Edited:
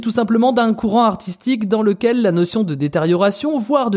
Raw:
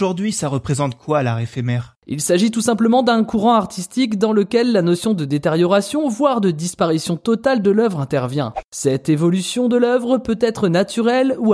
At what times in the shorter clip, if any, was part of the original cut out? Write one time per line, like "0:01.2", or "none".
none